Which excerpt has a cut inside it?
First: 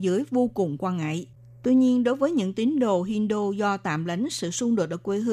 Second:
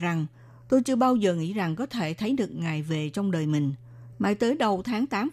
second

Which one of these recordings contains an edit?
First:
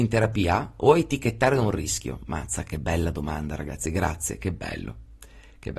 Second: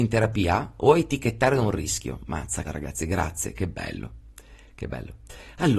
second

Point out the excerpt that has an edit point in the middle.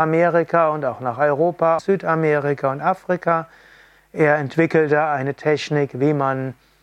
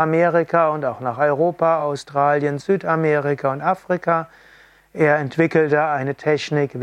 first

